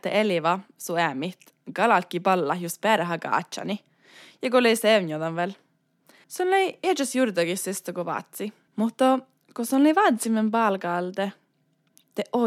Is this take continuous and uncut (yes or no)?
no